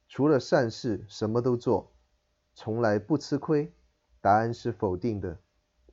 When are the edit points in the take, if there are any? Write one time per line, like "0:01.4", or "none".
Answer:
0:02.4
0:04.1